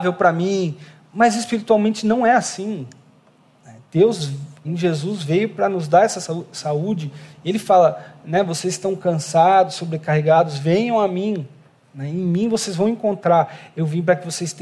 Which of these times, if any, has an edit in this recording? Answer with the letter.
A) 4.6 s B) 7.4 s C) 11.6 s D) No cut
A